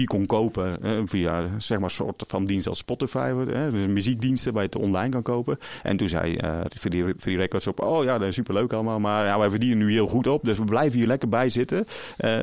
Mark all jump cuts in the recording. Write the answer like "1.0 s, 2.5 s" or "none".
none